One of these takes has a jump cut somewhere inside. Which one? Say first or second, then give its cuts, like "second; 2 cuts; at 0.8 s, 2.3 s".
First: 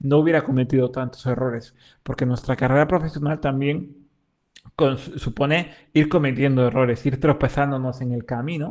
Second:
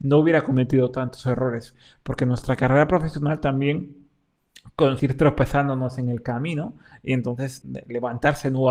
second; 2 cuts; at 5.0 s, 7.6 s